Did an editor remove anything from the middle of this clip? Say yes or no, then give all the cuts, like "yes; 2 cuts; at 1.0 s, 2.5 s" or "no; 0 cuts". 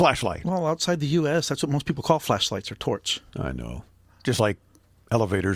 no; 0 cuts